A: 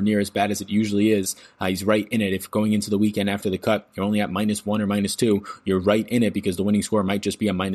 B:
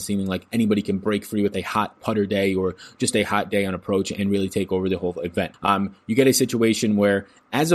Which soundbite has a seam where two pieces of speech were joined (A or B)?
B